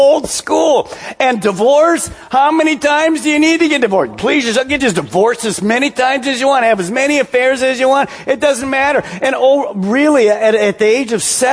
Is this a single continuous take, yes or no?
yes